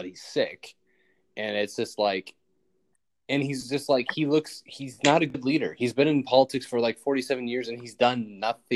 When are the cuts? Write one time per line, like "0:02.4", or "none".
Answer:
none